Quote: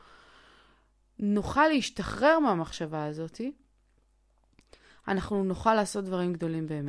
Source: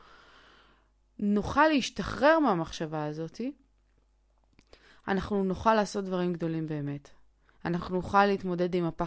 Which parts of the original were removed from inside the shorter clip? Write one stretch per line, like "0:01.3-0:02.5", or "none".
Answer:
none